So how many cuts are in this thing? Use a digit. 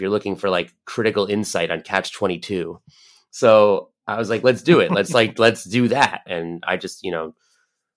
1